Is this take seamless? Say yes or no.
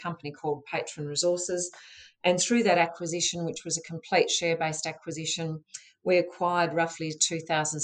yes